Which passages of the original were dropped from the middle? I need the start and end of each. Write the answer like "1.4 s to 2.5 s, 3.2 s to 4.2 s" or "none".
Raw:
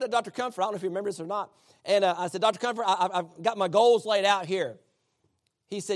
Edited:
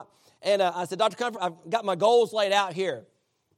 2.8 s to 3.1 s